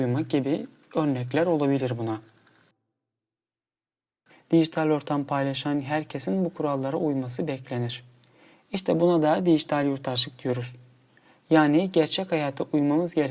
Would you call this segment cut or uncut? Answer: cut